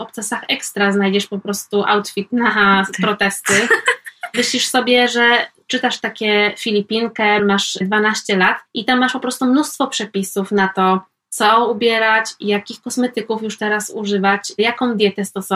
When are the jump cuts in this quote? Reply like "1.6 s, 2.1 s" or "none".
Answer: 7.4 s, 11.2 s